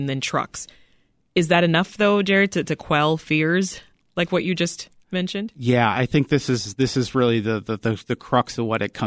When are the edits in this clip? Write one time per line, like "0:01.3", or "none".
none